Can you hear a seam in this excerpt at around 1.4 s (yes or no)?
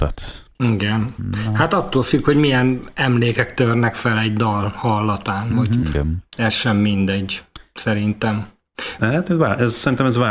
no